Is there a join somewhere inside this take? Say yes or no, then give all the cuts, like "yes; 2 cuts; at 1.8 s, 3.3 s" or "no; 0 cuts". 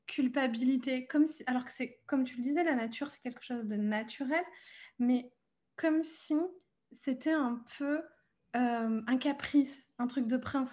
no; 0 cuts